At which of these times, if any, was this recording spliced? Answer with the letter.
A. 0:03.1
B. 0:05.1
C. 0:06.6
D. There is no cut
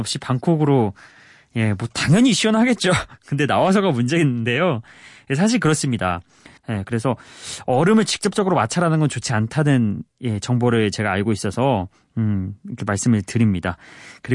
C